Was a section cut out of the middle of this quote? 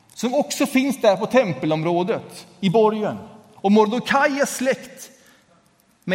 no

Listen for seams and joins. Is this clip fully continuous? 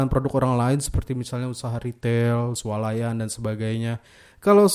yes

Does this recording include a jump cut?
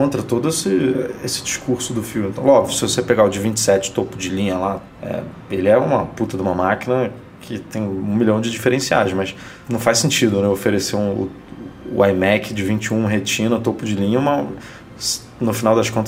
no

